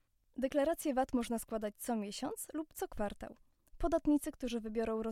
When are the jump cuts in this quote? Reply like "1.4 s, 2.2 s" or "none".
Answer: none